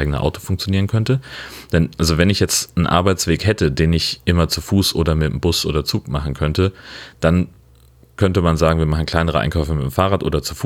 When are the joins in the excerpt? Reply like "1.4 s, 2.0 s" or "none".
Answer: none